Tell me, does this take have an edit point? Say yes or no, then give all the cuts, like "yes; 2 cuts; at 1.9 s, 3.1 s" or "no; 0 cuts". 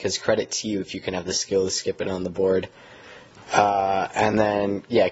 no; 0 cuts